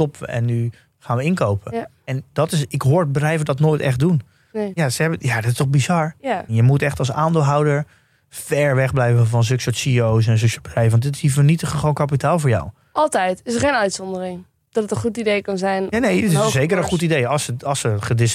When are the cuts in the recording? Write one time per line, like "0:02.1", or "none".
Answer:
0:04.7